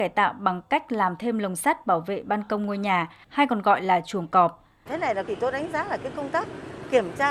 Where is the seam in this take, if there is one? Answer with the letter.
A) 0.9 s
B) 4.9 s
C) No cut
B